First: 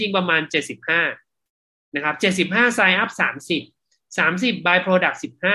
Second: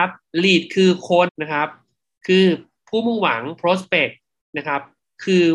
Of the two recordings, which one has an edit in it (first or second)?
second